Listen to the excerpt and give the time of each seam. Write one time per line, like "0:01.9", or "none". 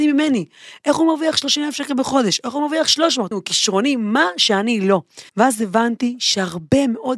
0:03.3
0:05.3